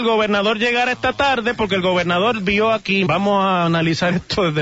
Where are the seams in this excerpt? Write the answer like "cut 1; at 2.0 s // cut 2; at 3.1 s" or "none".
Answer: cut 1; at 3.1 s

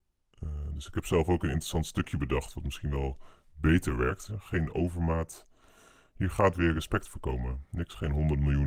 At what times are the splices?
cut 1; at 4.3 s // cut 2; at 6.7 s

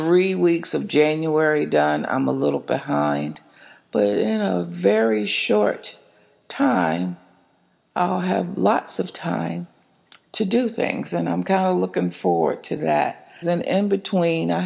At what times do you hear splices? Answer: cut 1; at 13.4 s

